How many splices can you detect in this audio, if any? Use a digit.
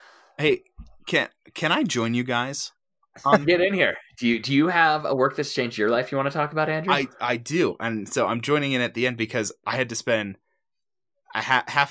1